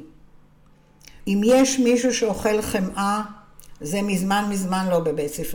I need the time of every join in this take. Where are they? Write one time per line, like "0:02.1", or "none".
0:01.2